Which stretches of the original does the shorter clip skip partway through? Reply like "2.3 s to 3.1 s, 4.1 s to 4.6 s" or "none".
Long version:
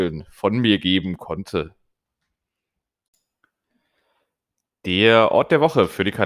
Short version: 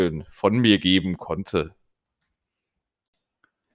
none